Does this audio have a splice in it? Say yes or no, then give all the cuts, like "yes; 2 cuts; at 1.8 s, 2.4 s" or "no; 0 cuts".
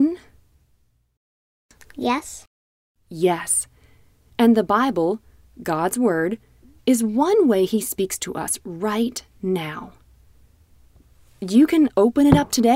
no; 0 cuts